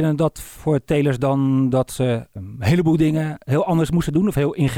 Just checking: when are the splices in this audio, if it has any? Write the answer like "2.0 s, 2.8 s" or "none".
2.4 s